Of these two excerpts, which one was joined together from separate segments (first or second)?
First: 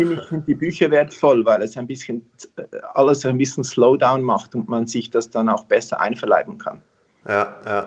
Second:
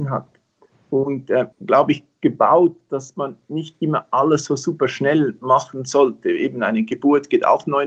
second